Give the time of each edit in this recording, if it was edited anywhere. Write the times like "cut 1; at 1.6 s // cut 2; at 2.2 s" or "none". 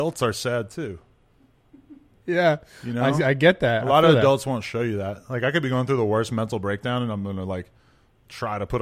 cut 1; at 2.2 s